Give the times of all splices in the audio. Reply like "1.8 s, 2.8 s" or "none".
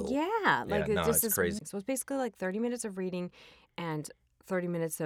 1.6 s